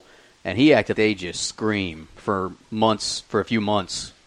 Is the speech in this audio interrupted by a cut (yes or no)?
yes